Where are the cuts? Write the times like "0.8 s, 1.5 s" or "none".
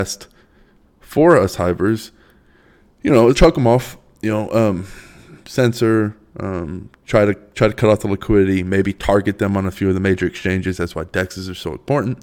3.3 s